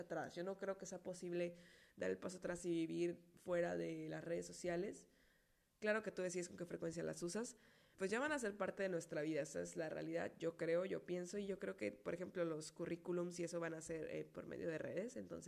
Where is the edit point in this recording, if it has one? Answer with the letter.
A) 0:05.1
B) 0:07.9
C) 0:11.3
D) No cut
B